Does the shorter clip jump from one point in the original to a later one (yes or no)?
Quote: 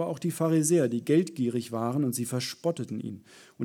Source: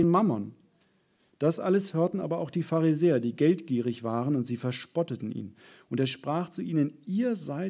no